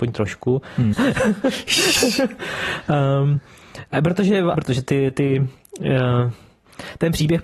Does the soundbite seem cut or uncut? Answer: cut